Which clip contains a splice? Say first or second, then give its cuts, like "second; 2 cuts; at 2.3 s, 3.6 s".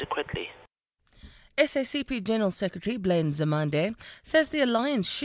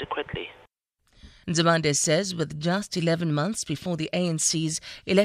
second; 1 cut; at 1.4 s